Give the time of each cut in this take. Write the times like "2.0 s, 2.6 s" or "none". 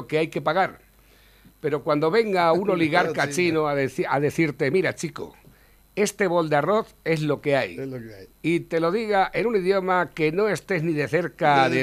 none